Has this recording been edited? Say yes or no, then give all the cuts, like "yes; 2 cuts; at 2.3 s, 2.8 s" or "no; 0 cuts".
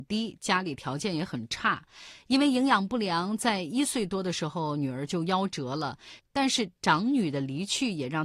yes; 1 cut; at 6.2 s